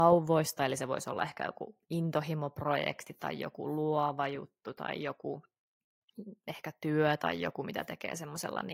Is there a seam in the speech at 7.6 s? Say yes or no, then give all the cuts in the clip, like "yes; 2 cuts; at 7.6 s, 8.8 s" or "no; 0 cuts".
no; 0 cuts